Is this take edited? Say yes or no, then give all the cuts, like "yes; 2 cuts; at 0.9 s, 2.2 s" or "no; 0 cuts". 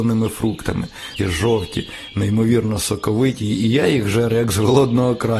yes; 1 cut; at 1.2 s